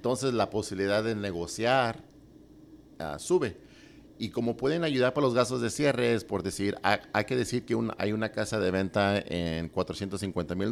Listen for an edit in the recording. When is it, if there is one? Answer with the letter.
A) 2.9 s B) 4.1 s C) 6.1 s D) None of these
D